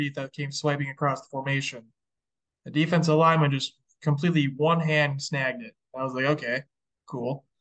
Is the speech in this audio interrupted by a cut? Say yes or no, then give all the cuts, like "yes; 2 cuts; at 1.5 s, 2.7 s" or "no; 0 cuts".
no; 0 cuts